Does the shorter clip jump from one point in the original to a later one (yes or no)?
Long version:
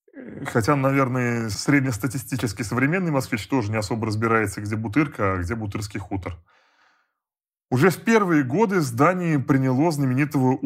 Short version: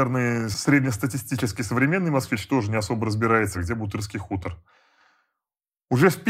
yes